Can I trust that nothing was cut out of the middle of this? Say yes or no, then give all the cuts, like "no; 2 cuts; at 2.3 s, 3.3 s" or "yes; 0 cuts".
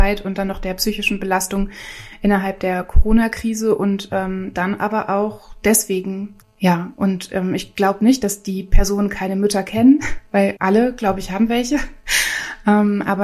no; 2 cuts; at 6.4 s, 10.6 s